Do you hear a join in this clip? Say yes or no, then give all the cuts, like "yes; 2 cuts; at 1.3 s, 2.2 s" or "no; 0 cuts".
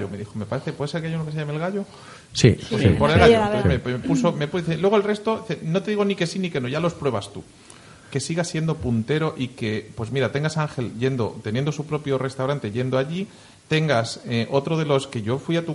yes; 1 cut; at 8.0 s